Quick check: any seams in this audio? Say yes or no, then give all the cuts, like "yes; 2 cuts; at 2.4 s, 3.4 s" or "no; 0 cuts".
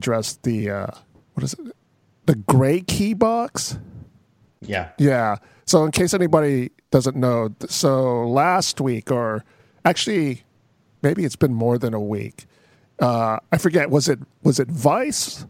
no; 0 cuts